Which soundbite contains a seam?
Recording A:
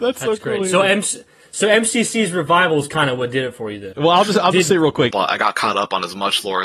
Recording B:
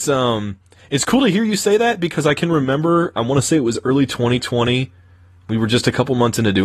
A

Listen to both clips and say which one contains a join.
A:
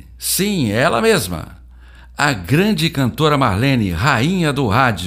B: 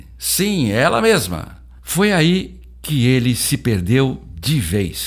B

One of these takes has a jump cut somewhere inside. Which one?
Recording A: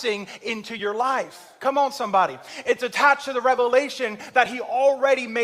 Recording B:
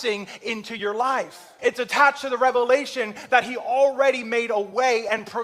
B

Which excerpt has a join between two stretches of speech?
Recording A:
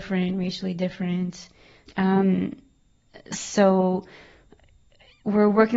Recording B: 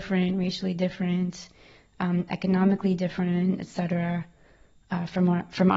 A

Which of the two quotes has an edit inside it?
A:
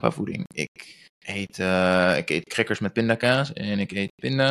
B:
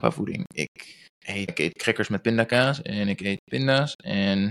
B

